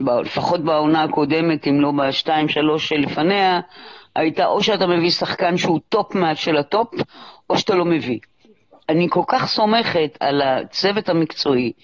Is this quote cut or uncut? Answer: cut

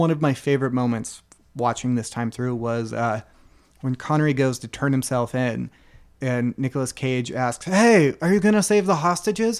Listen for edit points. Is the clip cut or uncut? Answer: uncut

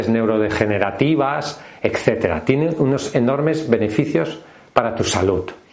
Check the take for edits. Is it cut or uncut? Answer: uncut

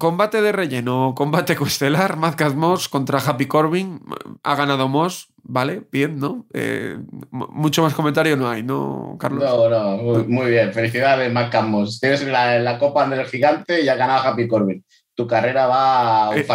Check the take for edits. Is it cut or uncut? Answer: uncut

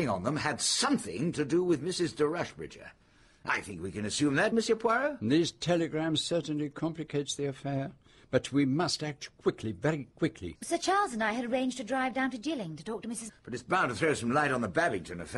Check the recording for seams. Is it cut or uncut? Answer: cut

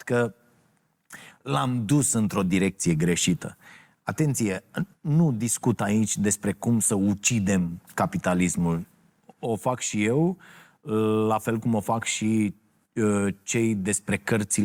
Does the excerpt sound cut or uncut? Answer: uncut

